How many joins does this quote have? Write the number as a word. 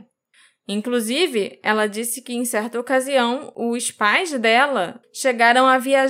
one